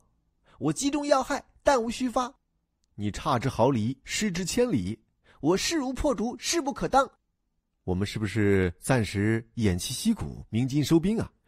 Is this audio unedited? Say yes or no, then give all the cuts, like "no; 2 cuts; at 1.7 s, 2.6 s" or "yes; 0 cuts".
yes; 0 cuts